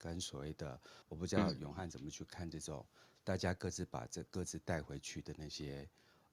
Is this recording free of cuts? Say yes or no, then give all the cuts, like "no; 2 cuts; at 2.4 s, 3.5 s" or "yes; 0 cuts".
no; 1 cut; at 1.0 s